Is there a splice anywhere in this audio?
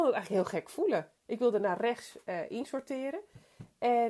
no; 0 cuts

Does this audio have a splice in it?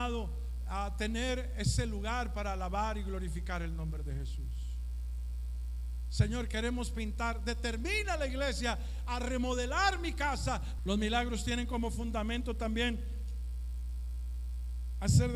yes; 1 cut; at 10.8 s

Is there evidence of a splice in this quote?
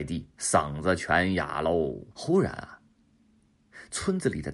yes; 1 cut; at 2.1 s

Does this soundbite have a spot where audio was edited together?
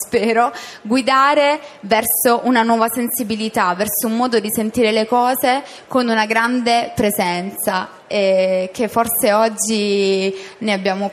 no; 0 cuts

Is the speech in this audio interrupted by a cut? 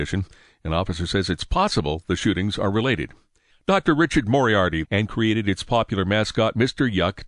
yes; 1 cut; at 4.8 s

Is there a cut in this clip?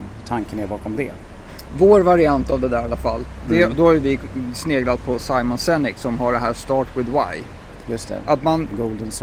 no; 0 cuts

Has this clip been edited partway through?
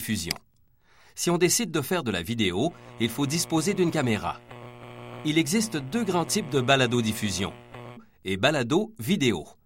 yes; 1 cut; at 8.0 s

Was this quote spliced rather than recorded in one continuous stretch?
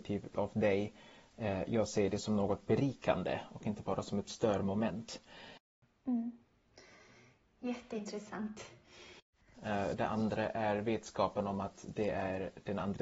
yes; 1 cut; at 9.5 s

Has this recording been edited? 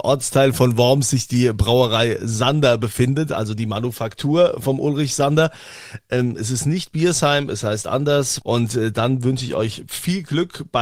yes; 1 cut; at 8.4 s

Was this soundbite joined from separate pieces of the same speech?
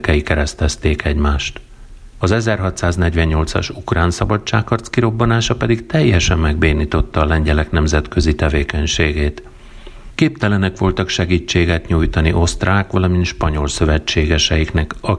yes; 1 cut; at 2.2 s

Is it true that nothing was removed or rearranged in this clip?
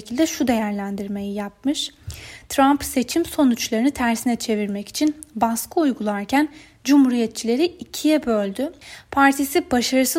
yes; 0 cuts

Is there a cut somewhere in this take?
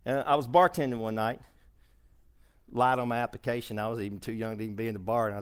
no; 0 cuts

